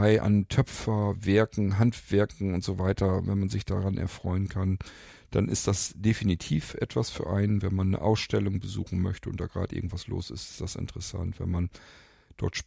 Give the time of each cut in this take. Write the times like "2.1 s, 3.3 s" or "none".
none